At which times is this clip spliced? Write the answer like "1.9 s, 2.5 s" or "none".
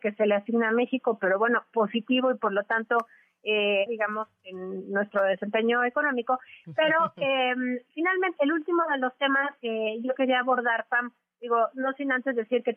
3.9 s, 6.6 s, 8.4 s

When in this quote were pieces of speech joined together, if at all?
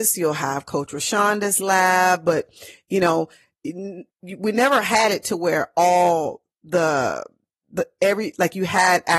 none

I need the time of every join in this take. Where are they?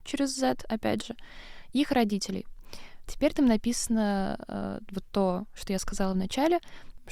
3.0 s

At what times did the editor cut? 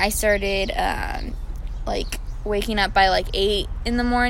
none

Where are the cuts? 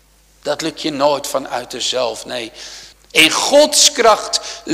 2.9 s

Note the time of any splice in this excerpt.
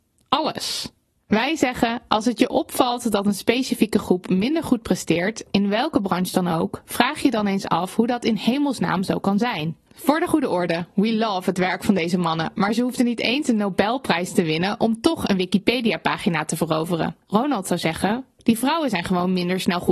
9.9 s, 17.2 s

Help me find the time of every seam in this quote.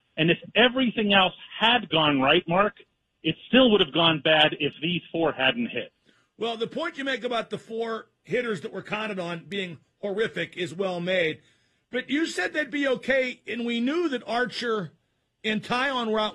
none

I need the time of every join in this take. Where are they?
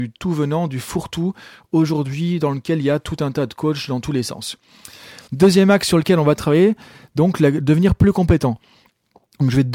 5.3 s

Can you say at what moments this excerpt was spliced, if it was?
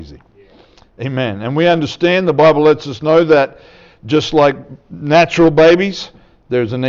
none

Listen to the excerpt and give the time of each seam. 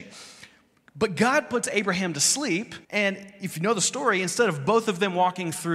2.8 s

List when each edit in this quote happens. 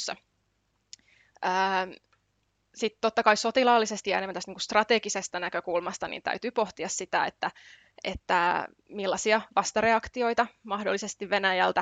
none

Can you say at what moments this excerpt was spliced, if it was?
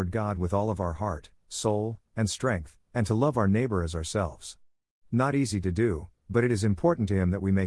none

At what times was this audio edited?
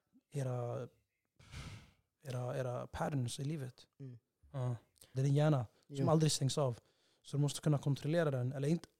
5.1 s

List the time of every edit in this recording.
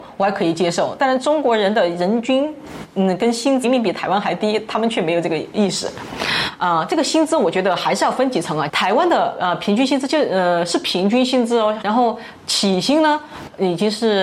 3.6 s, 11.8 s

